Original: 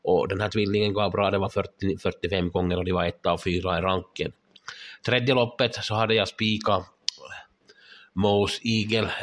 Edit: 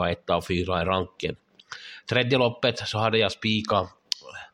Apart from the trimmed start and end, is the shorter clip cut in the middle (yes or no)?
no